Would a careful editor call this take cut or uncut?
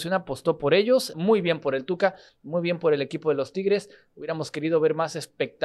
cut